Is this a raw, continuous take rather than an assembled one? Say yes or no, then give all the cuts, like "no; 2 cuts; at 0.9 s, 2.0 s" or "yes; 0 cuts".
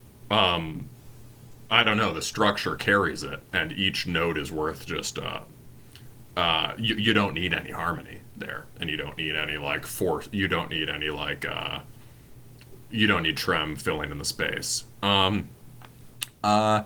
yes; 0 cuts